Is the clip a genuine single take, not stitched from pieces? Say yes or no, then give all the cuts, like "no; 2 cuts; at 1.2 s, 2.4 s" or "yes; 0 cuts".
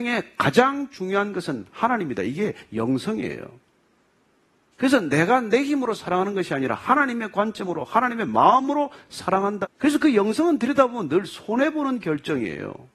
no; 1 cut; at 9.6 s